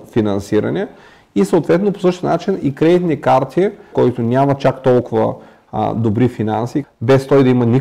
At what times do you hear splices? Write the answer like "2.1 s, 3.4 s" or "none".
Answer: 3.9 s, 6.8 s

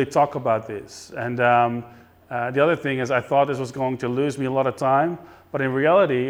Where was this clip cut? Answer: none

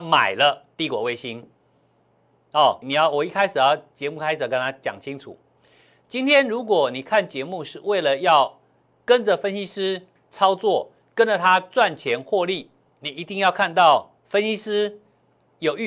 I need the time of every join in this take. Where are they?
2.8 s, 12.9 s, 14.2 s

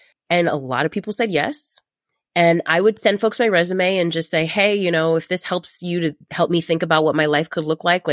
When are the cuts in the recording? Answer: none

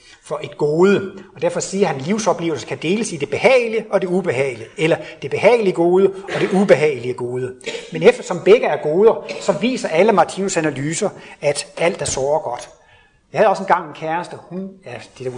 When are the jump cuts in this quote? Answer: none

